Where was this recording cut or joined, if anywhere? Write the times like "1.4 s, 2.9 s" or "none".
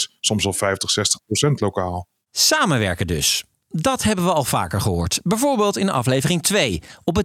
none